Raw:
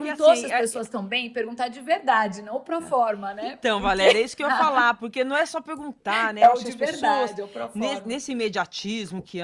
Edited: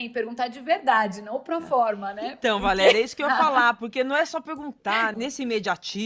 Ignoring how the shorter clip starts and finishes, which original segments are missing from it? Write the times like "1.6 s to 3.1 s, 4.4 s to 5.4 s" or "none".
6.3 s to 8.0 s